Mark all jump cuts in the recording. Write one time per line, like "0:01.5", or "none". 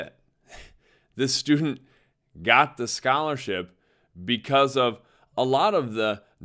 none